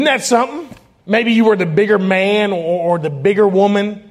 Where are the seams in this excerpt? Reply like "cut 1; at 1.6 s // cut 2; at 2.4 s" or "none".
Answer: cut 1; at 1.0 s